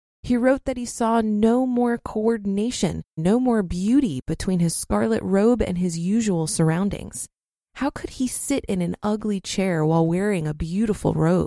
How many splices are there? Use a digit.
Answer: 1